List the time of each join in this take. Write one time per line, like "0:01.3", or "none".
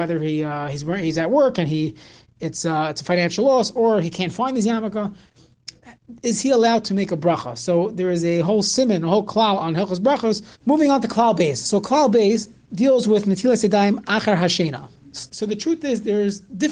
0:10.5
0:15.3